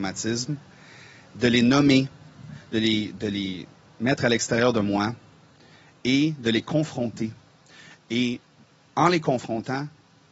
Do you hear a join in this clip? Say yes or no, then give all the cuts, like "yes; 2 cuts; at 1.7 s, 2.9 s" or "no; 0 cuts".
no; 0 cuts